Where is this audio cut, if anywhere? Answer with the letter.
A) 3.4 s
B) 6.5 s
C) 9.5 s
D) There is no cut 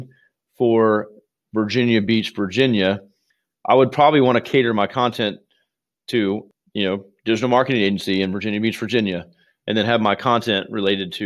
D